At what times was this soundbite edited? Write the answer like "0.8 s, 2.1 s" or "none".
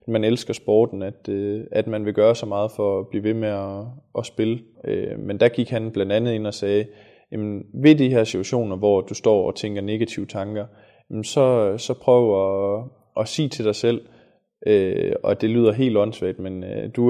4.7 s